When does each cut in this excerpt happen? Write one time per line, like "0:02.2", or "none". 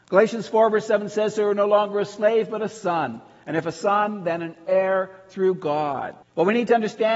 0:06.2